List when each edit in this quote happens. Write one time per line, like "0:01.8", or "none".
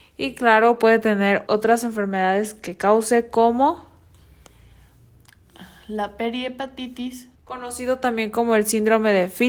0:01.5
0:07.3

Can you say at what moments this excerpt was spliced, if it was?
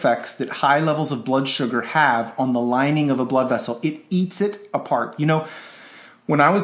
none

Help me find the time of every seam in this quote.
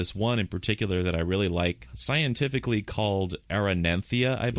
none

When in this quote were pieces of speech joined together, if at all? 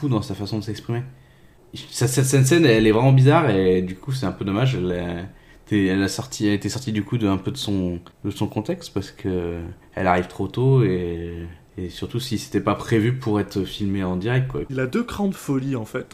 0:14.6

